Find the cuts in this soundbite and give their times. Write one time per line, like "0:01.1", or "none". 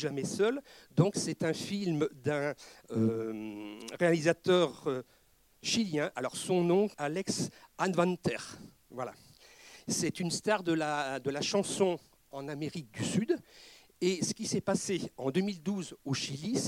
0:06.9